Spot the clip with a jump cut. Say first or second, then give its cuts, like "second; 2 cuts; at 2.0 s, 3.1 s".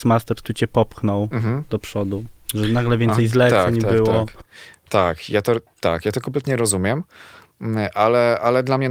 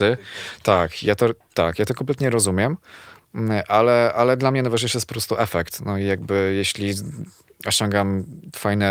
first; 1 cut; at 4.9 s